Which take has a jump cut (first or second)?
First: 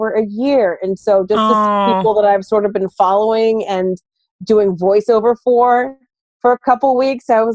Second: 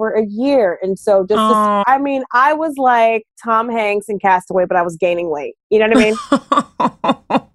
second